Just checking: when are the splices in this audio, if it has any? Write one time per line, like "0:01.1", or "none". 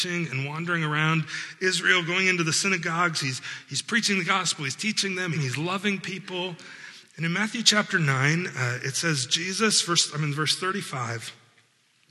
0:05.3
0:07.1